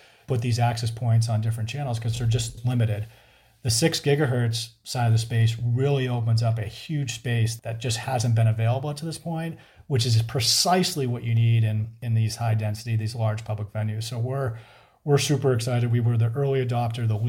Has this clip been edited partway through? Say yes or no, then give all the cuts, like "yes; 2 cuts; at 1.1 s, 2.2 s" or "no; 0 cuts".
no; 0 cuts